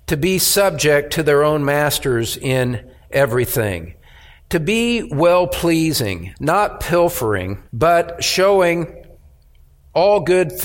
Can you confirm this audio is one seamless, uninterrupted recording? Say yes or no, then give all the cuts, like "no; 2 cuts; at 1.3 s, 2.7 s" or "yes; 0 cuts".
no; 2 cuts; at 6.3 s, 7.7 s